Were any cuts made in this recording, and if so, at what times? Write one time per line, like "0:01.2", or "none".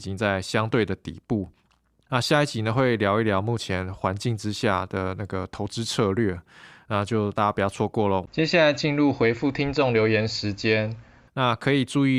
0:02.1
0:11.3